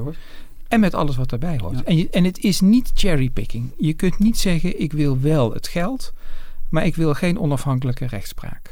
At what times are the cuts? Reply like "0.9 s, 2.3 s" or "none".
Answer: none